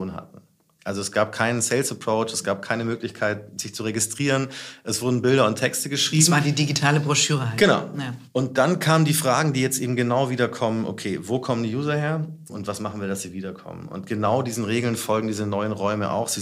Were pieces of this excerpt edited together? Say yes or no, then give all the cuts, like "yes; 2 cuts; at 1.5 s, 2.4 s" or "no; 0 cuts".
yes; 1 cut; at 12.5 s